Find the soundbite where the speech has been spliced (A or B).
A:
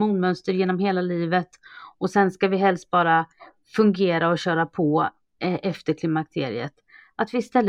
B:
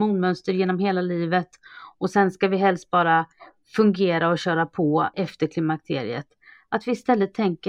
B